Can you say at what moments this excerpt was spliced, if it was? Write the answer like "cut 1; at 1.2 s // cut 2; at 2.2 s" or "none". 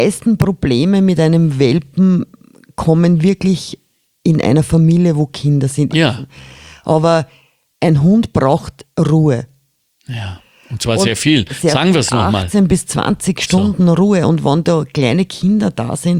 cut 1; at 5.9 s

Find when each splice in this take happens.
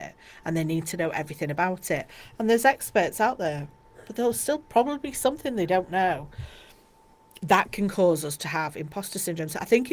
none

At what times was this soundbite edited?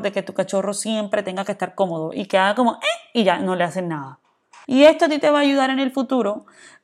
cut 1; at 4.6 s

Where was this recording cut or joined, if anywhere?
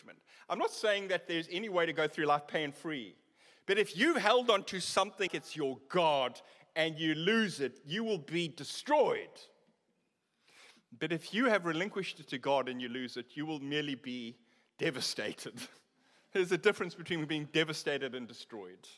cut 1; at 5.3 s

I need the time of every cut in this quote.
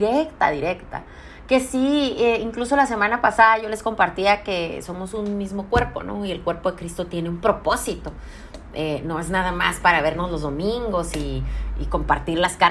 none

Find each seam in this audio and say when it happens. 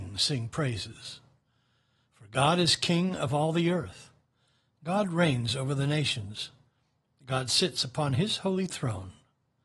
cut 1; at 4.7 s

